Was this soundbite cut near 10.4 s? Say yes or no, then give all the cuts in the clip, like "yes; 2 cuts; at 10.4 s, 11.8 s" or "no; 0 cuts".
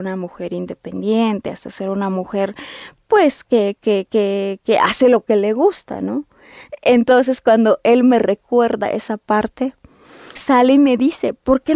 yes; 1 cut; at 10.4 s